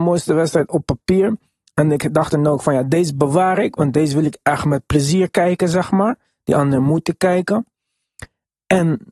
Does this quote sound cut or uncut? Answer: uncut